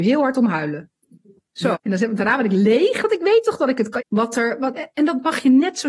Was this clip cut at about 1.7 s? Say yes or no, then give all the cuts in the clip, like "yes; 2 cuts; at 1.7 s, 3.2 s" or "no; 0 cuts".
yes; 2 cuts; at 1.7 s, 4.0 s